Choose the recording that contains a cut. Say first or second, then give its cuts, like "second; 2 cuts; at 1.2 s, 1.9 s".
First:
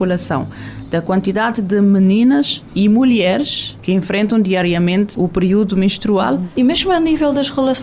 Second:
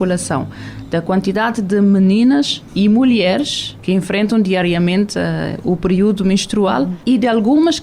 first; 2 cuts; at 5.1 s, 6.5 s